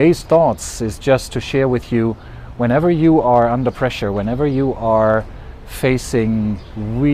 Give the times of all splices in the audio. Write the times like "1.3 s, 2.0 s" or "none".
none